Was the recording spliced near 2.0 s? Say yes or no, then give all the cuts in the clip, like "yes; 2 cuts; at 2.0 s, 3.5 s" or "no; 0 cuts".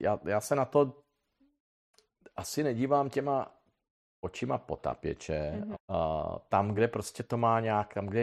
no; 2 cuts; at 5.7 s, 6.8 s